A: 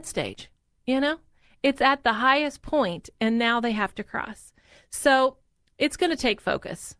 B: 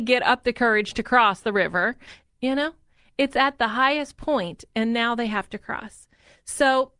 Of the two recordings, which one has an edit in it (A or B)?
B